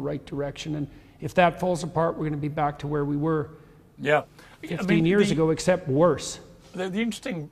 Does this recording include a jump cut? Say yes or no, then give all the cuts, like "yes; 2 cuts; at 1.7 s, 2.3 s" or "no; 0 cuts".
no; 0 cuts